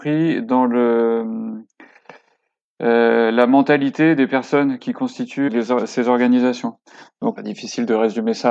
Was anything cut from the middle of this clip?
yes; 2 cuts; at 5.5 s, 7.4 s

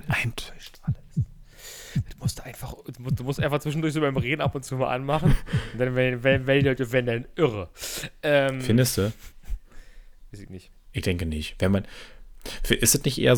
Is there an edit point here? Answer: no; 0 cuts

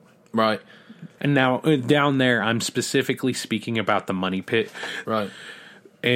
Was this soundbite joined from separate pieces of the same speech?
yes; 2 cuts; at 1.2 s, 5.0 s

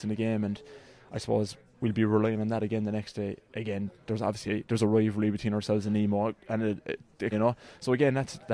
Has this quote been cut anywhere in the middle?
yes; 1 cut; at 7.3 s

